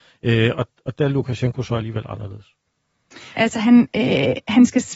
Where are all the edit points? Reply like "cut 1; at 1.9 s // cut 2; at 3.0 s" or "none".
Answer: cut 1; at 3.4 s